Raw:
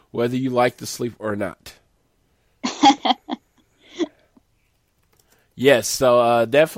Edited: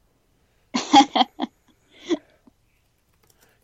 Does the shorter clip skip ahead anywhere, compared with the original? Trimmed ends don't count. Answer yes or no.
no